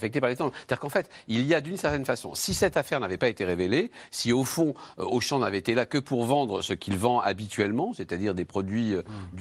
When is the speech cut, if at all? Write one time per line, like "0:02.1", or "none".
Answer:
none